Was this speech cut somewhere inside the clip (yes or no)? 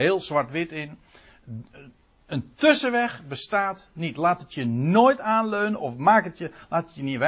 no